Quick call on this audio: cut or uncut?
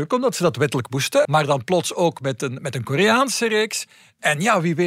cut